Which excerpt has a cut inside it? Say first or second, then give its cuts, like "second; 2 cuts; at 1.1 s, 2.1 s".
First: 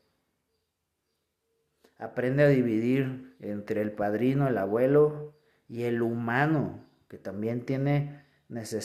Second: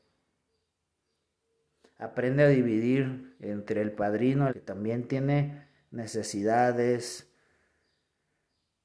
second; 1 cut; at 4.5 s